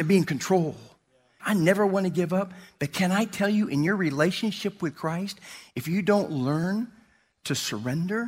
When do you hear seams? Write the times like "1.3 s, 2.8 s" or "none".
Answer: 1.4 s